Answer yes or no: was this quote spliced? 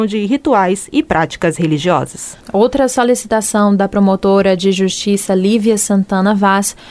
yes